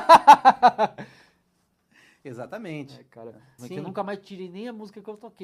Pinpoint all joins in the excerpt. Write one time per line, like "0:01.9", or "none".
0:03.6